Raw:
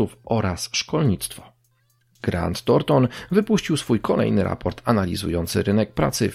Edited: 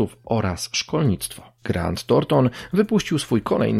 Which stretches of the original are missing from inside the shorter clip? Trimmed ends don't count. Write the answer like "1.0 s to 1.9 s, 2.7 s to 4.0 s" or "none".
1.6 s to 2.2 s